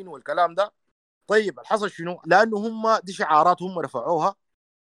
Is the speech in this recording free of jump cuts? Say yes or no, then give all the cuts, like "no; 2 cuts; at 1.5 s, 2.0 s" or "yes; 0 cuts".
no; 1 cut; at 2.2 s